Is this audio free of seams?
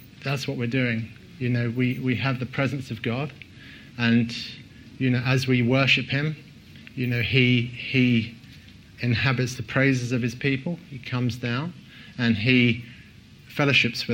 yes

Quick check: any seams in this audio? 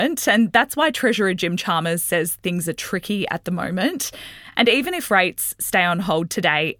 no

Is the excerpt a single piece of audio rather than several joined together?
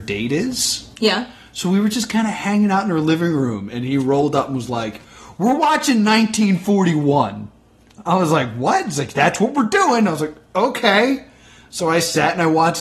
yes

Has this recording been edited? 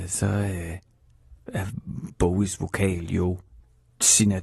no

